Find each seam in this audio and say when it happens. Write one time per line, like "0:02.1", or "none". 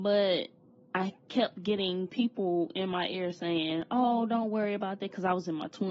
none